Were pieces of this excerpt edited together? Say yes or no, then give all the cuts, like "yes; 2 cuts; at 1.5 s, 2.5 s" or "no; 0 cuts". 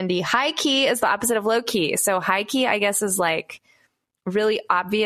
no; 0 cuts